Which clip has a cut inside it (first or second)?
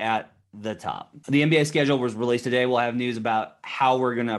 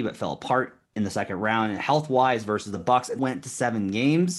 second